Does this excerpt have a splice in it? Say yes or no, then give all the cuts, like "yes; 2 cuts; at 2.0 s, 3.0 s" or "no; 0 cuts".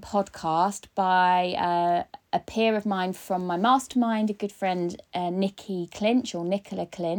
no; 0 cuts